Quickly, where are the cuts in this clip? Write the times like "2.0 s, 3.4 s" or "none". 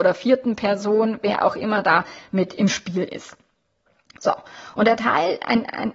none